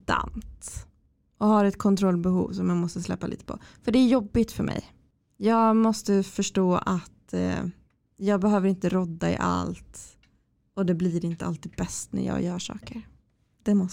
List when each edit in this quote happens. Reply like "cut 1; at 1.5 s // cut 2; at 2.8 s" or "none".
none